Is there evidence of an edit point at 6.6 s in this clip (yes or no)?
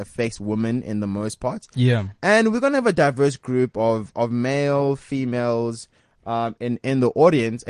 yes